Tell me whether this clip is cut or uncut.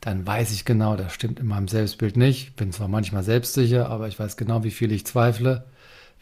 uncut